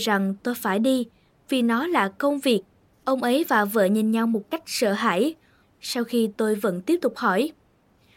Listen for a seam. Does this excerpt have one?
yes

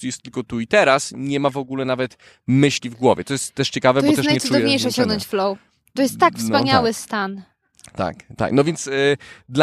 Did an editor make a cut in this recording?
no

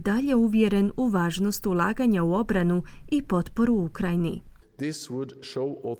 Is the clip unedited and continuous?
no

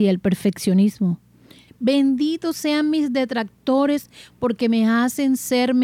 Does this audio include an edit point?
yes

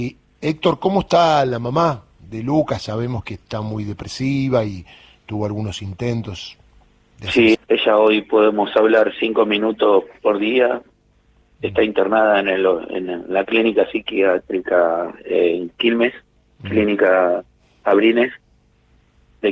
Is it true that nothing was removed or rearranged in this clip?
no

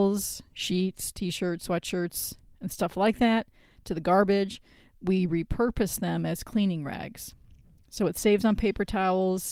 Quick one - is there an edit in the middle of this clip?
no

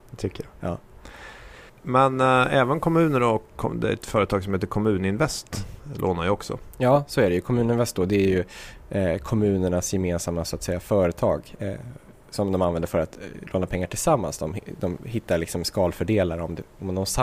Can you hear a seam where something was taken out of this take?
yes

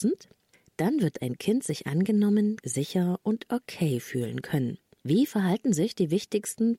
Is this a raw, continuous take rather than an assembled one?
no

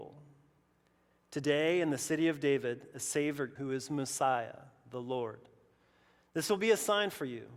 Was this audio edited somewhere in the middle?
yes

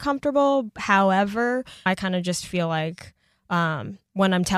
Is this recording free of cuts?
no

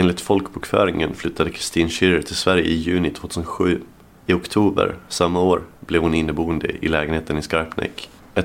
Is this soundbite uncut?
yes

